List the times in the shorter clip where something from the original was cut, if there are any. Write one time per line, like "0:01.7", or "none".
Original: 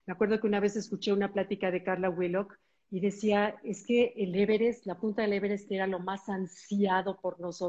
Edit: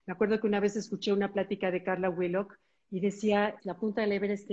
0:03.6